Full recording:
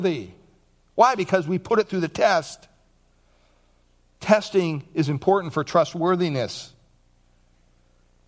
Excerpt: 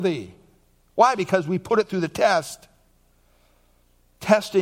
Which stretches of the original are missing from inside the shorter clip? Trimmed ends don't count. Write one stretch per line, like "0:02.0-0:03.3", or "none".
none